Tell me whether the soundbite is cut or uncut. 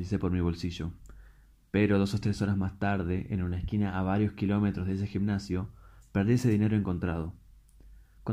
uncut